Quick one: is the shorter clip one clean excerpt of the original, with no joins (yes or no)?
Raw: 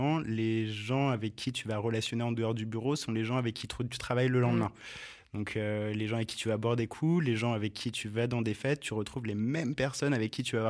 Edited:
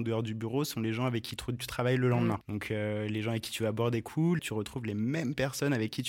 no